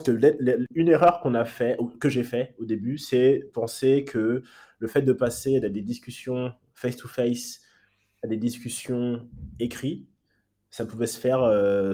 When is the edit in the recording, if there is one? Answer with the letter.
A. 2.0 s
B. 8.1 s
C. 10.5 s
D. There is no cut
D